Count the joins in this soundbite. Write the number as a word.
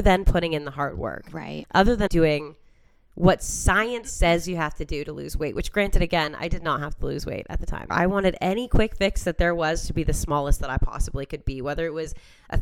two